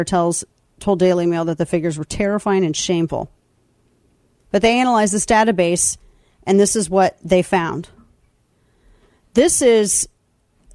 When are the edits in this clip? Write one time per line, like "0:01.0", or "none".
0:04.4